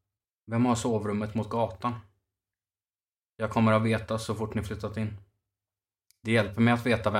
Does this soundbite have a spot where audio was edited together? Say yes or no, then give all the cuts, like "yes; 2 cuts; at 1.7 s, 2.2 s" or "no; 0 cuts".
no; 0 cuts